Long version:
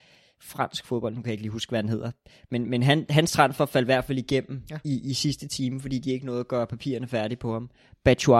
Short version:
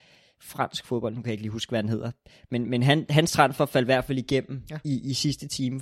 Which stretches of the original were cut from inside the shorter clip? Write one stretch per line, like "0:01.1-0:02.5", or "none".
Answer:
none